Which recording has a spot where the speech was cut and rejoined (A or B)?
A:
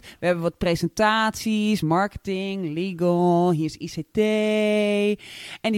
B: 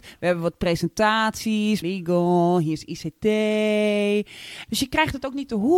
B